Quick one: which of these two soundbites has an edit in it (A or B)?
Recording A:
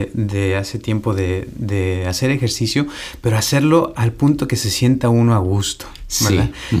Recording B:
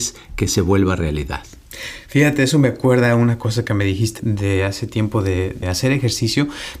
B